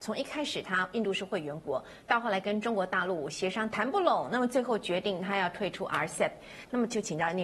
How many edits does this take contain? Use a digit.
0